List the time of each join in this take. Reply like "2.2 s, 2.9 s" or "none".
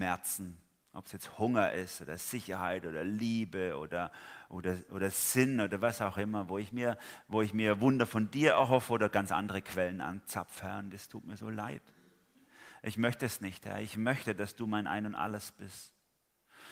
none